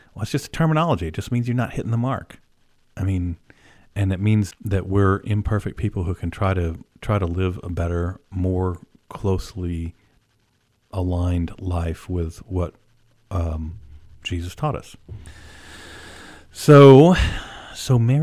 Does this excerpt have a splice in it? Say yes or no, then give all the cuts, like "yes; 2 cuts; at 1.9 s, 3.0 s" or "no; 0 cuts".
yes; 1 cut; at 4.5 s